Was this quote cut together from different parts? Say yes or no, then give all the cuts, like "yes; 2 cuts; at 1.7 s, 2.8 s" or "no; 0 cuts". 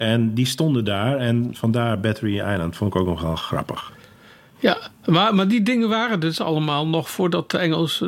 no; 0 cuts